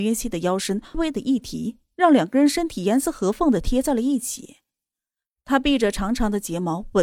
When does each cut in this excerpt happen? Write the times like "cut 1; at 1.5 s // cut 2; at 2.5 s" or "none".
cut 1; at 0.9 s